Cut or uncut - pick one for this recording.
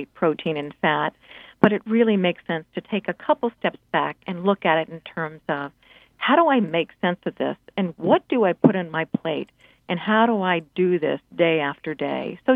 uncut